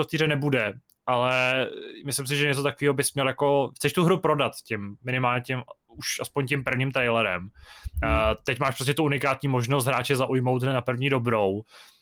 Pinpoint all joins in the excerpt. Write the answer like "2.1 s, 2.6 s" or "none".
none